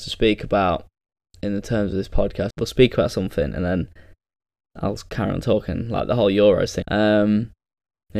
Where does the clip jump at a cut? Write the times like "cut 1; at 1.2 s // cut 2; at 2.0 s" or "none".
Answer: cut 1; at 2.5 s // cut 2; at 6.8 s